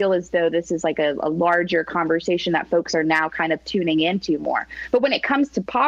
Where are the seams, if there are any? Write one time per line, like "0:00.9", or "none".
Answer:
none